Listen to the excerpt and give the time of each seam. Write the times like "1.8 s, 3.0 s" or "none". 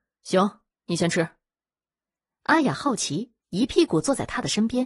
none